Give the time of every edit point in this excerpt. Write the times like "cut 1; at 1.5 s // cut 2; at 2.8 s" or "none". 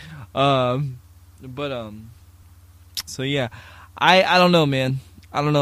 cut 1; at 3.1 s